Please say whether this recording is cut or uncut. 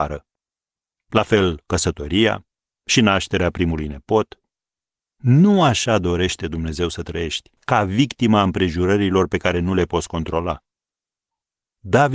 cut